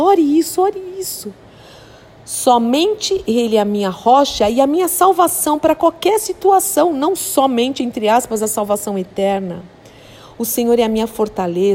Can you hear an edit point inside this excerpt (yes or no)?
no